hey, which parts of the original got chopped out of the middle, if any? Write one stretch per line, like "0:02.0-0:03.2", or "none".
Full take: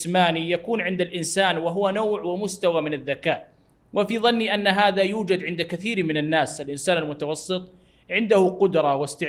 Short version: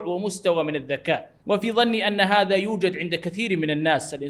0:03.6-0:03.9